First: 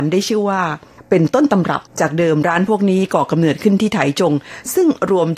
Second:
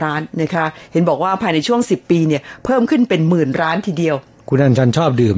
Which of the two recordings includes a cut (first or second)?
first